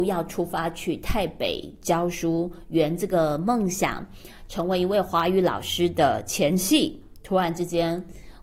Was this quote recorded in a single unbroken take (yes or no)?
yes